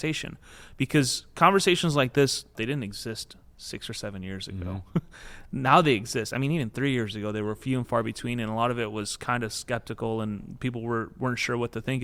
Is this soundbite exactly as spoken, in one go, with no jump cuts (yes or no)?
no